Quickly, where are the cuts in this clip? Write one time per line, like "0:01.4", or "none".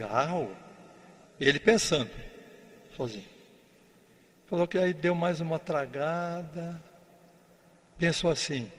0:01.3